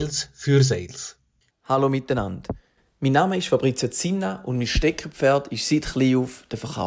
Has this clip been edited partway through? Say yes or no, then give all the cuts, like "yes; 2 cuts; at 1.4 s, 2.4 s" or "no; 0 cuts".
yes; 1 cut; at 1.5 s